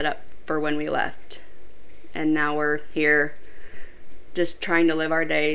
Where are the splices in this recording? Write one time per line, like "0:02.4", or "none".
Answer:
none